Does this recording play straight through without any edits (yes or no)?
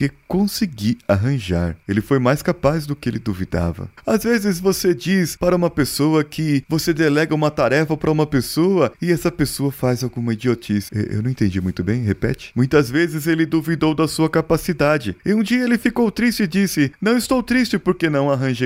no